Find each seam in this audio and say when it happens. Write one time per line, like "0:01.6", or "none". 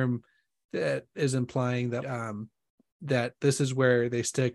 0:02.0

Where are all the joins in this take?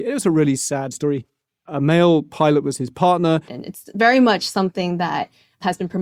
0:03.5

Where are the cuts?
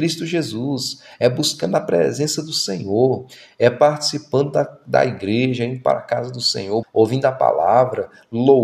0:06.8

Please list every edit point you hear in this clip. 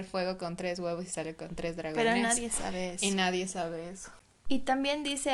none

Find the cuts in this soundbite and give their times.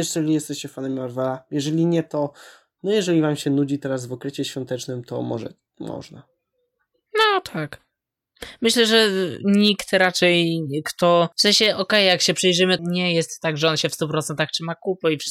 0:11.3
0:12.8

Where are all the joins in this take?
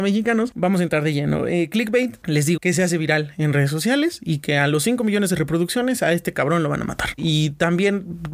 0:02.6
0:07.2

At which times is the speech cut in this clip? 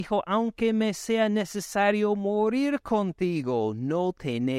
none

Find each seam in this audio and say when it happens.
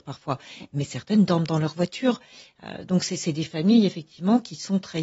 none

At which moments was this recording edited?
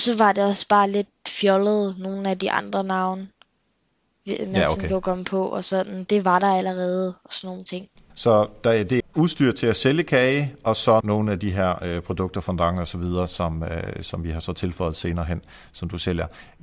0:09.0
0:11.0

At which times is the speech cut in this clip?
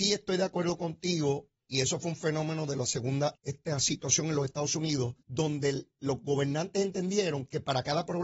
0:03.4
0:05.2

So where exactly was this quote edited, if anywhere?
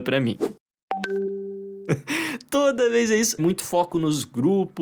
0:01.9
0:03.4

